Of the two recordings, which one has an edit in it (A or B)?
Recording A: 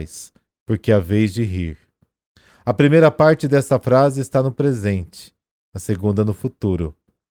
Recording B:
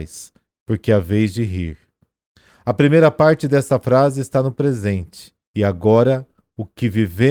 B